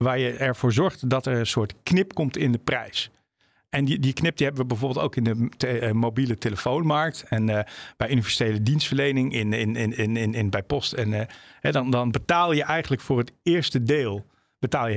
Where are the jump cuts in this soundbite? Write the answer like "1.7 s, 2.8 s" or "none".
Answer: none